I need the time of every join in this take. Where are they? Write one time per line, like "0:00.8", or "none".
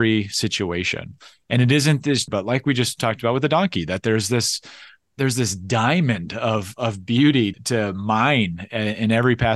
0:02.3
0:07.5